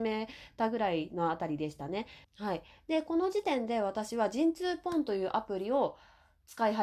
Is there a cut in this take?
yes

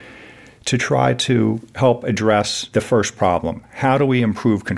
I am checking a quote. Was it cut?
no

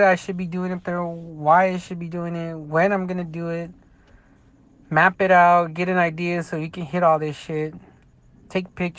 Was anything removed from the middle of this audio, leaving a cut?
no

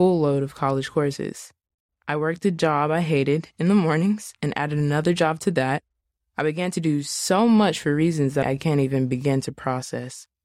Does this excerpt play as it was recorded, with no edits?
no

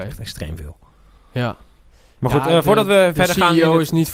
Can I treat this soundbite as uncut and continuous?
yes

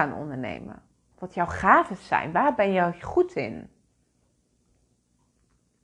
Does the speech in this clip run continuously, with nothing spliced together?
no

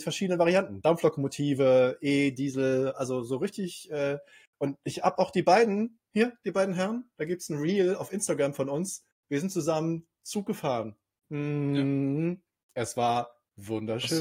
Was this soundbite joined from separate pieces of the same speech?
no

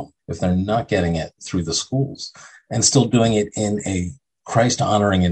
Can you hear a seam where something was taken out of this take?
yes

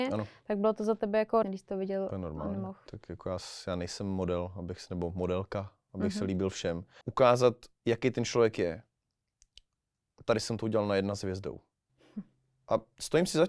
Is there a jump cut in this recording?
yes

